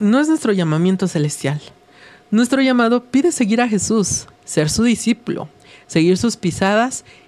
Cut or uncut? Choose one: uncut